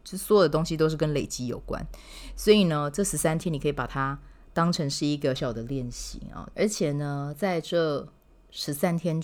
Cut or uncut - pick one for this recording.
cut